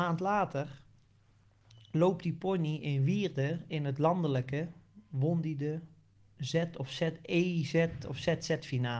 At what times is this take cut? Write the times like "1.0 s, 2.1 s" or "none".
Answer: none